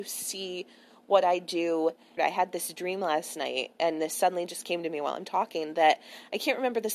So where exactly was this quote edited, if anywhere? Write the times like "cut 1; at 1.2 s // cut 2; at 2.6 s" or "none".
cut 1; at 2.2 s